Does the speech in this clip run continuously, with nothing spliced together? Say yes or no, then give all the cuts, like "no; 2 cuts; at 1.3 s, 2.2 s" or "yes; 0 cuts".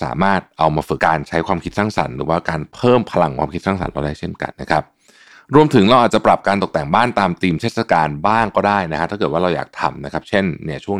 no; 2 cuts; at 1.0 s, 4.5 s